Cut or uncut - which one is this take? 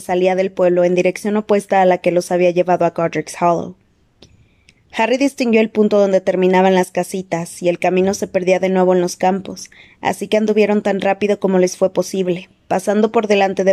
uncut